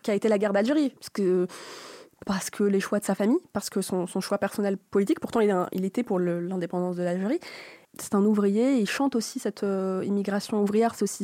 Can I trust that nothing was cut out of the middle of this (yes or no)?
no